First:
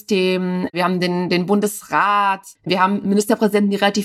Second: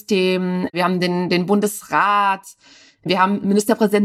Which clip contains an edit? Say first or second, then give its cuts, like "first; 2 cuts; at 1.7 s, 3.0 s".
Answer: first; 1 cut; at 2.5 s